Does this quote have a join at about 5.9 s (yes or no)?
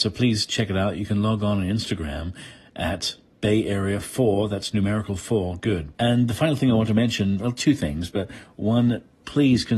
yes